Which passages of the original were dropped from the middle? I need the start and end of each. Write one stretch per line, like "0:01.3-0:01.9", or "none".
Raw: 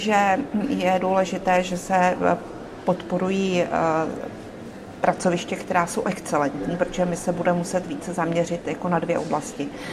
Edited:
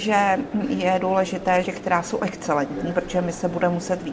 0:01.6-0:05.5